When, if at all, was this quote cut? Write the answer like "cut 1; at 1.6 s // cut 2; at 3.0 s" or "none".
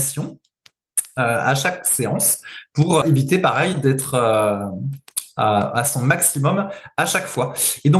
cut 1; at 3.0 s

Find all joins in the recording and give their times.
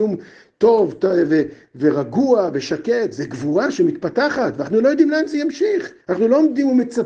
cut 1; at 6.0 s

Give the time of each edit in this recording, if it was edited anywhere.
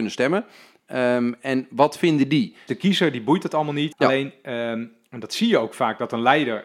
cut 1; at 2.7 s // cut 2; at 3.9 s

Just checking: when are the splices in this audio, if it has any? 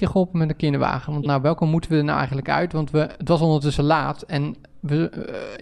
cut 1; at 1.3 s

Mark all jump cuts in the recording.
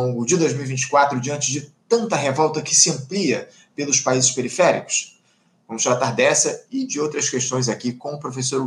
none

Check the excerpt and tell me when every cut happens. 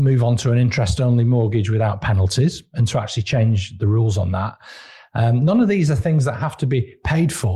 none

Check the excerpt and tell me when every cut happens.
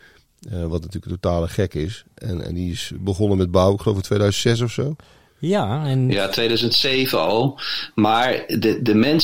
none

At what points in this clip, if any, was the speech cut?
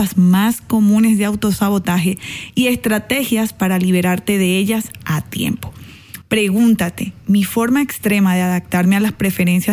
cut 1; at 6.2 s

